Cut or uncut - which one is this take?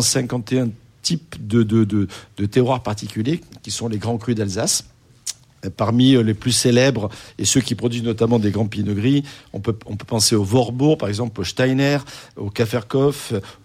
uncut